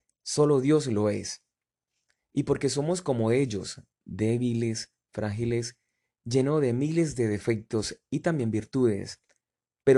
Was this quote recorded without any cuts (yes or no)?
yes